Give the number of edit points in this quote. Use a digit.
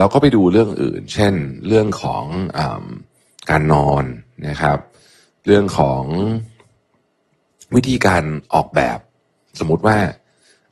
0